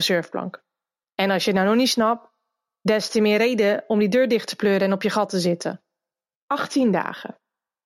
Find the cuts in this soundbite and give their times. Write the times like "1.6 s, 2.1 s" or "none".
none